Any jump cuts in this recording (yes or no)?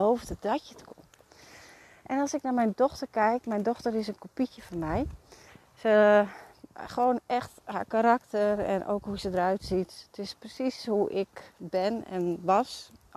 no